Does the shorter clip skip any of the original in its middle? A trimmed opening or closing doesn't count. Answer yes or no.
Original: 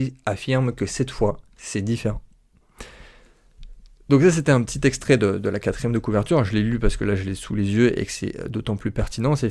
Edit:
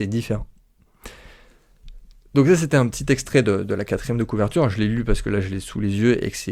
no